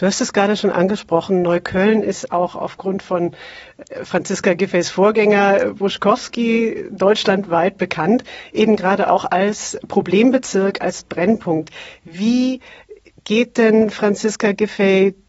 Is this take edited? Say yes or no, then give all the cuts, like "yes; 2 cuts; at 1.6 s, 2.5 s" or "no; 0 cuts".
no; 0 cuts